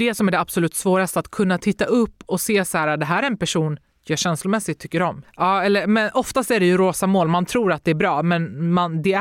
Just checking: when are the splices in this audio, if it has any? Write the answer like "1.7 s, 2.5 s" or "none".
5.2 s